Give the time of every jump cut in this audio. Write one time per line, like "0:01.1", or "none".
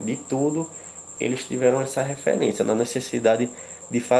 none

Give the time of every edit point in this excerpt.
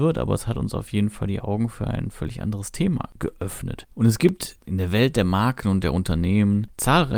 0:03.8

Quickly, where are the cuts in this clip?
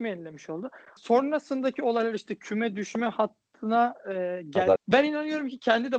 0:01.0
0:04.8

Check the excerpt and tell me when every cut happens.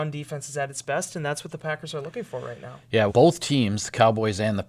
0:03.1

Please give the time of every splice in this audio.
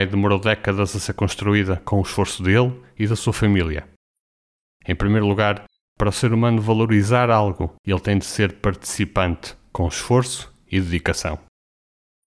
0:04.8

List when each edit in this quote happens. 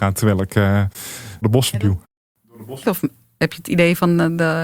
0:01.4
0:02.8

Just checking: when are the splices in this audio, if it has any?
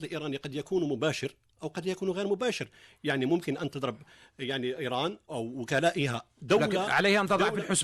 0:03.7
0:05.3

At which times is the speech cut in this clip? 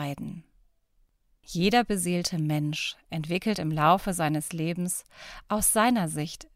0:01.3

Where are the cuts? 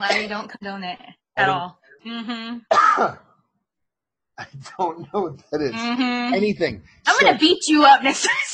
0:02.0

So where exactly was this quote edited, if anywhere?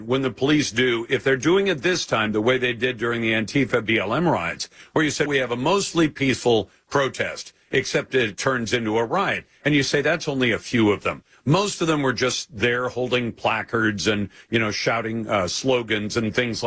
0:05.3

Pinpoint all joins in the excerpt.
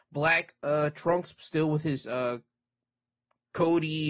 none

